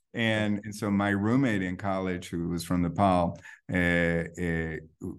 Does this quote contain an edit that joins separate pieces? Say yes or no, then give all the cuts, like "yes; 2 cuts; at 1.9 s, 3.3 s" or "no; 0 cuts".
no; 0 cuts